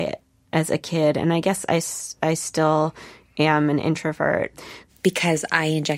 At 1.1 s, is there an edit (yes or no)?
no